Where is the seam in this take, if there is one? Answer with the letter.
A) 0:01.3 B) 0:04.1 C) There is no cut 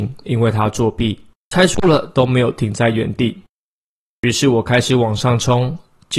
A